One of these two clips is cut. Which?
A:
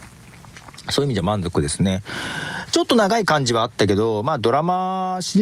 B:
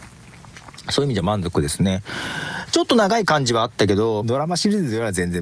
B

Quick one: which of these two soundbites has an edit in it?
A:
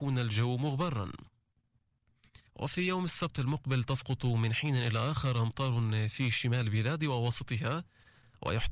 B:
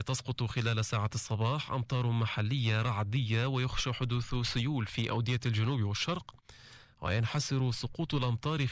A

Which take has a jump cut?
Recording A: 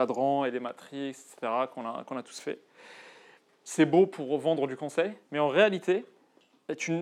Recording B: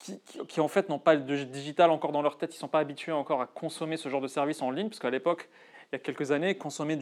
A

